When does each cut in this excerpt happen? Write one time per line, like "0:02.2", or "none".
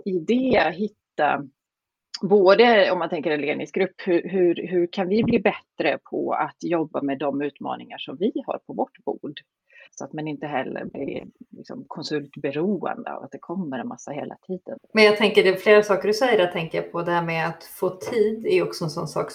0:09.9
0:14.8